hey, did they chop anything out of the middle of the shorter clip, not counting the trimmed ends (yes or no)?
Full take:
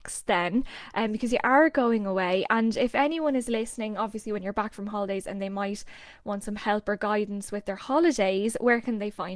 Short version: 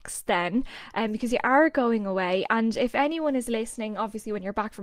no